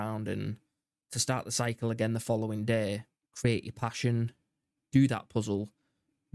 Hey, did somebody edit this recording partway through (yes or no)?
yes